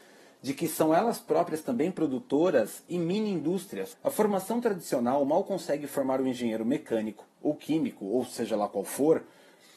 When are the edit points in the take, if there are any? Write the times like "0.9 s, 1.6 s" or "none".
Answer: 3.9 s